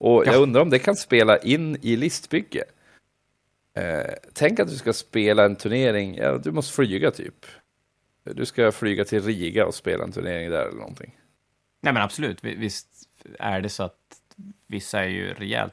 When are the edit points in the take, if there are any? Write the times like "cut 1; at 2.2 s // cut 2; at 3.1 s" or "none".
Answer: none